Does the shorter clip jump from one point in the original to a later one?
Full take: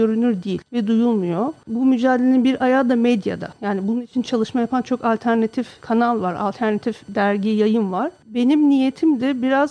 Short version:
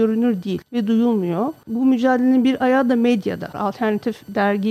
yes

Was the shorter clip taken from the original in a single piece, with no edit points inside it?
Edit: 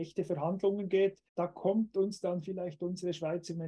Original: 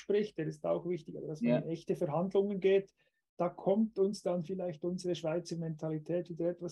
no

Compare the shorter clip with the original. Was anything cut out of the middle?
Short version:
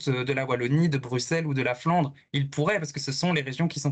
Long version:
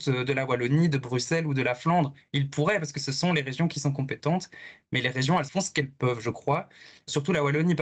no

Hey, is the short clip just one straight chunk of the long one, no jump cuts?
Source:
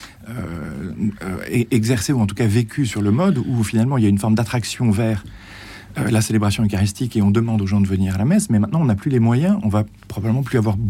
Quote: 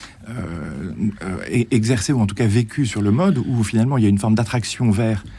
yes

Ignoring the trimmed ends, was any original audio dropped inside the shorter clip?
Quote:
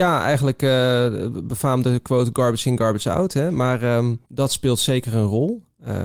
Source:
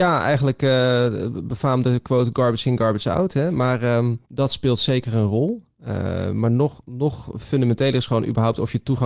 no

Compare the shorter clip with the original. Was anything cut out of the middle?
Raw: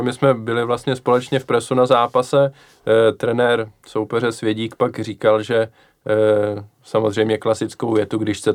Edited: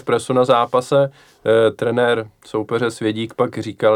no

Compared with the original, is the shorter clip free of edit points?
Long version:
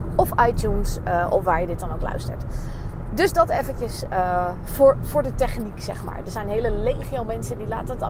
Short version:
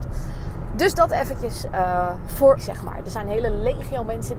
no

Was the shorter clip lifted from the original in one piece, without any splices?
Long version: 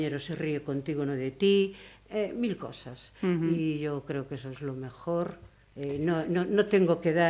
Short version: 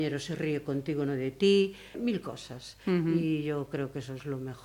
no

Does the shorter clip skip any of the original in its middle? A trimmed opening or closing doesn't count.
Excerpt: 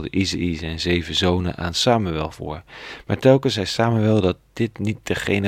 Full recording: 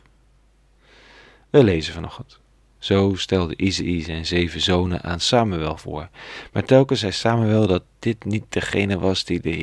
no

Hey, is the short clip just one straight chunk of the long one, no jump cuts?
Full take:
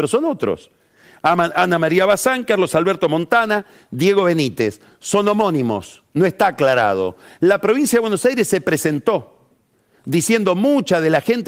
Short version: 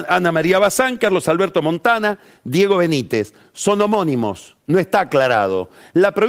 yes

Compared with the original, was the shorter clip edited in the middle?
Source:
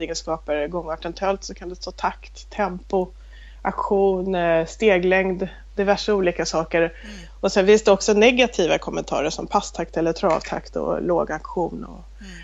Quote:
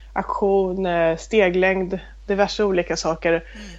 no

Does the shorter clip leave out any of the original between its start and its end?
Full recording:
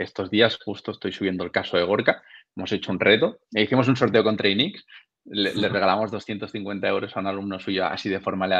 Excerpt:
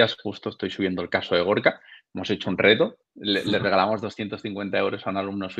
yes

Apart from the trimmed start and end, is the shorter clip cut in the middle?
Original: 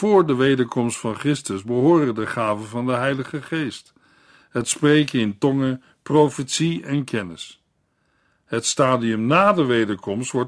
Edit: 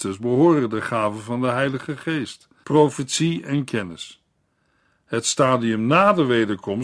yes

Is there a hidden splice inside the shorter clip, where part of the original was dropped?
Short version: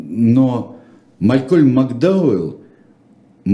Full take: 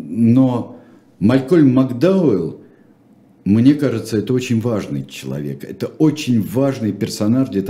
no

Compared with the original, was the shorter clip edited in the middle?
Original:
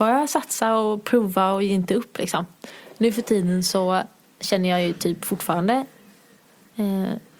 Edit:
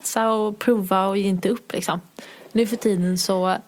no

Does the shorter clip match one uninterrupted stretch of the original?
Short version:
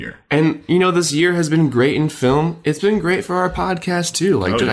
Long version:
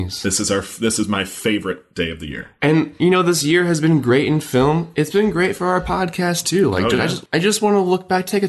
yes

